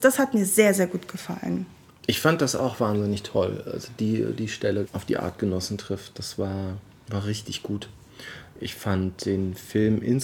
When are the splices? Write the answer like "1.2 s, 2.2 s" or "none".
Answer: 4.8 s